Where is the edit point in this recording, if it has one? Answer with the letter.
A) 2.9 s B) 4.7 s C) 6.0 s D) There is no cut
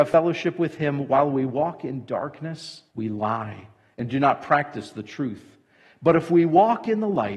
A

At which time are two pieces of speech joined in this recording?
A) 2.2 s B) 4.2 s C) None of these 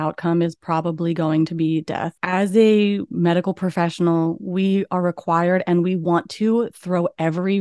A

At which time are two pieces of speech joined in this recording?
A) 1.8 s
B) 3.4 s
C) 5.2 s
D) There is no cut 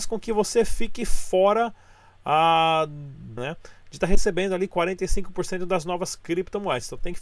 B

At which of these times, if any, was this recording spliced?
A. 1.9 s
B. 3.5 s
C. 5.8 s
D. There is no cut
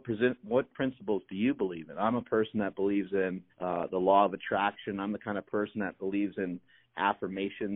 B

